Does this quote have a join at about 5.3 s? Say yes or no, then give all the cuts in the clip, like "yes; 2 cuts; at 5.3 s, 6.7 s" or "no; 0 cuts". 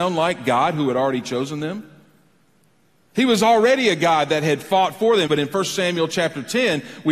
yes; 1 cut; at 5.3 s